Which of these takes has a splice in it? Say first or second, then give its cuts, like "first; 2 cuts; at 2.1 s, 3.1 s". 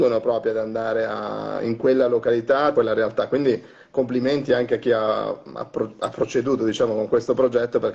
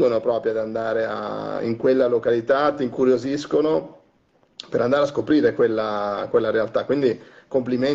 first; 1 cut; at 2.7 s